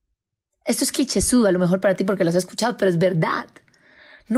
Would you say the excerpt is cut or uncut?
uncut